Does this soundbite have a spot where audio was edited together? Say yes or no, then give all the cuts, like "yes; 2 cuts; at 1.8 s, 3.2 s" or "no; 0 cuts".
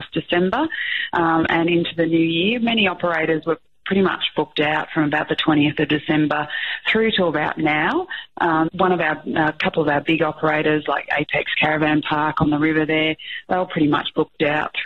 yes; 1 cut; at 8.7 s